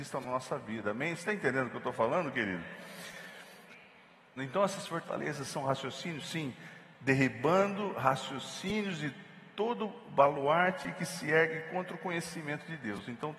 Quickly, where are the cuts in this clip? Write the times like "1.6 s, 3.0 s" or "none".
4.4 s